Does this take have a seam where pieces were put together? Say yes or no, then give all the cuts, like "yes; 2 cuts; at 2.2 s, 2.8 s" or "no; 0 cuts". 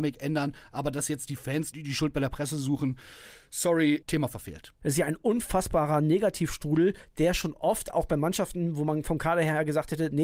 no; 0 cuts